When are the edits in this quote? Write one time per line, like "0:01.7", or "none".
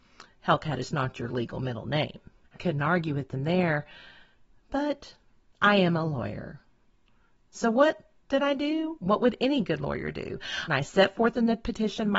0:02.5
0:10.7